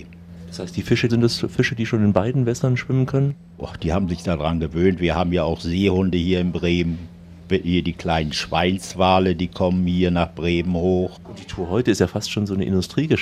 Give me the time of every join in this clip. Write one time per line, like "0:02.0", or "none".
0:01.1